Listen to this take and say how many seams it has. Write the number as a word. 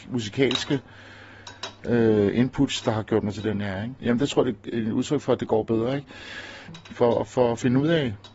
two